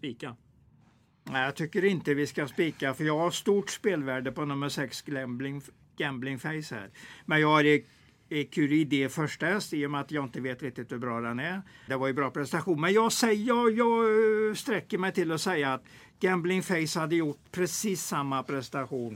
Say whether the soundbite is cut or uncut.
cut